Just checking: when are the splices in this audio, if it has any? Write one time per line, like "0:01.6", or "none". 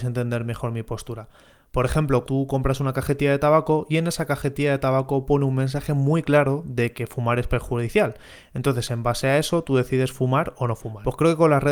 0:02.2